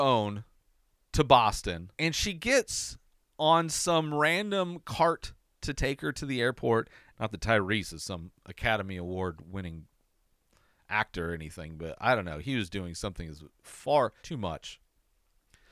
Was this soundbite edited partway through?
yes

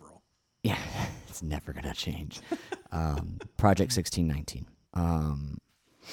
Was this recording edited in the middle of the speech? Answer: yes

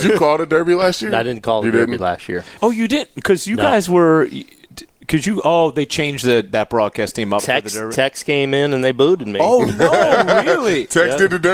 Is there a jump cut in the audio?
no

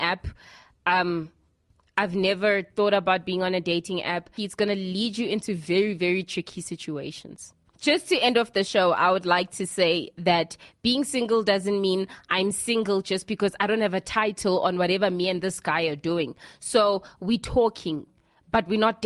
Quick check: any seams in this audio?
yes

